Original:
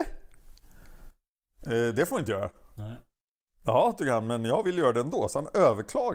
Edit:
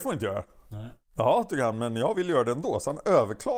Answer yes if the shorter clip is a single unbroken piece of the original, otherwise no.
no